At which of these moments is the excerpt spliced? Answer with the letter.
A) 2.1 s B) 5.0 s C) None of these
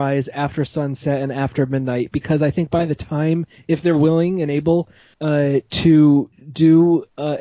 C